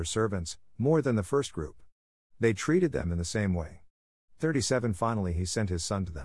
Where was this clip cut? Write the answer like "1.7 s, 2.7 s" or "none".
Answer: none

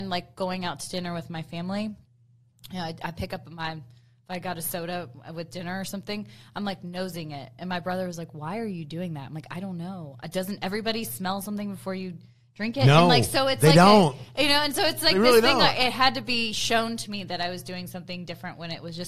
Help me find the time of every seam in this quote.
none

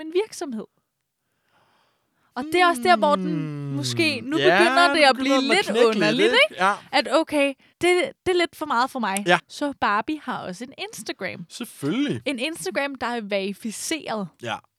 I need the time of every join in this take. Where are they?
7.7 s, 9.4 s

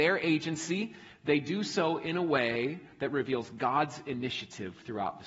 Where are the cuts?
none

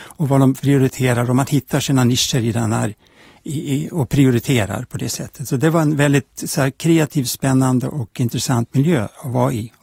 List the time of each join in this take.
none

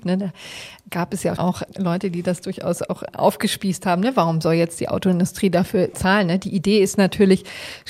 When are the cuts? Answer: 1.4 s

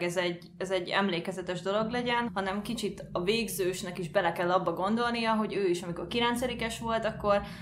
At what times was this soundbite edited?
2.3 s

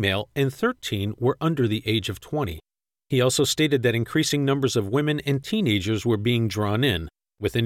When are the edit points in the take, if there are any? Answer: 2.9 s

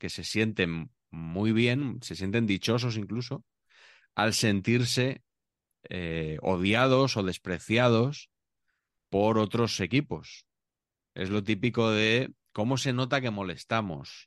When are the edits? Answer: none

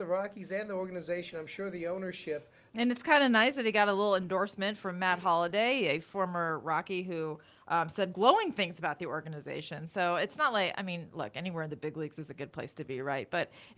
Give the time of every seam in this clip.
2.7 s

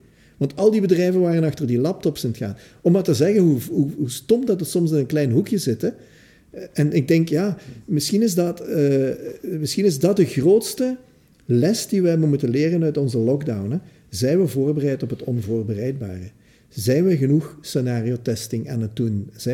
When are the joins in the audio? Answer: none

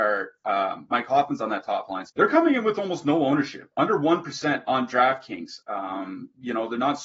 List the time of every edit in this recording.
2.1 s, 5.6 s

